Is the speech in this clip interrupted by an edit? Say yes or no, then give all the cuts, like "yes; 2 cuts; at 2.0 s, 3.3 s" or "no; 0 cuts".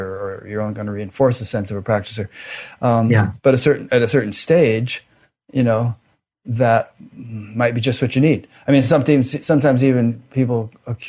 no; 0 cuts